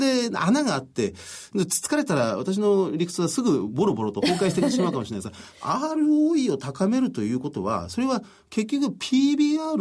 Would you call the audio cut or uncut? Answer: uncut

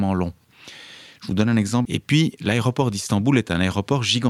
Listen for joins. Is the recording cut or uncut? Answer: cut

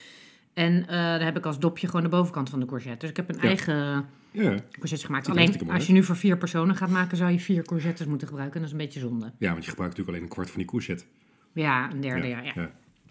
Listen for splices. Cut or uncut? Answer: uncut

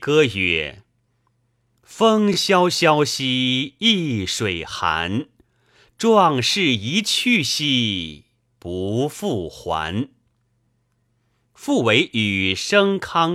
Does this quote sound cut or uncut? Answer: uncut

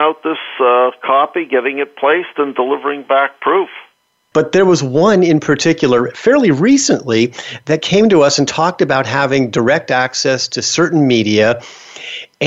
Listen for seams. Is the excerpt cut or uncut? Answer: cut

